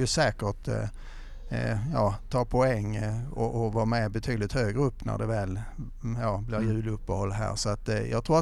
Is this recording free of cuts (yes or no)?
yes